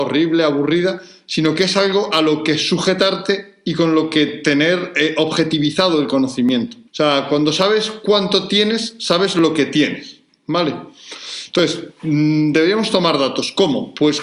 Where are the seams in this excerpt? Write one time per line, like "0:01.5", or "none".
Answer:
0:06.9